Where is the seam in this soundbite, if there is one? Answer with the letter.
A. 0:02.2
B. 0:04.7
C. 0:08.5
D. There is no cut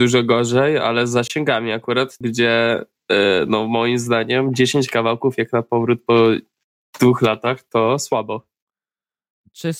A